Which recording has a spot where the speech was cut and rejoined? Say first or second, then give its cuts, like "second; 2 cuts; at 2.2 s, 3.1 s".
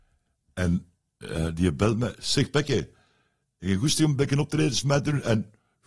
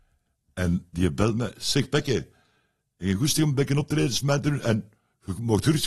second; 1 cut; at 0.9 s